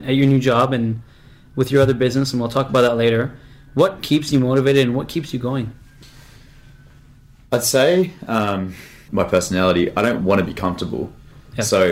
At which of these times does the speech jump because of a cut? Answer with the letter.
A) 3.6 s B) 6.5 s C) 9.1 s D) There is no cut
C